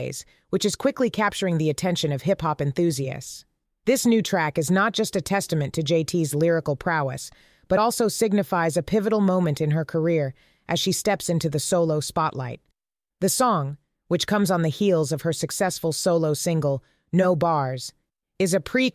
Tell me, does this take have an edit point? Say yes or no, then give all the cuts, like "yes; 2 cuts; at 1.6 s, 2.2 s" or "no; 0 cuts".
no; 0 cuts